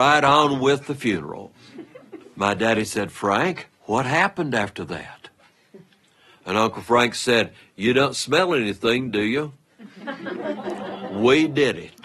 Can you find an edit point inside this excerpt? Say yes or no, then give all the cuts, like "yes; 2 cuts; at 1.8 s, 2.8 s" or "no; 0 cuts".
no; 0 cuts